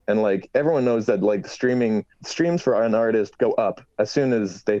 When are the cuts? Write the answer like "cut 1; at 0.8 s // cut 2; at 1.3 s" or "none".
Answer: cut 1; at 2.1 s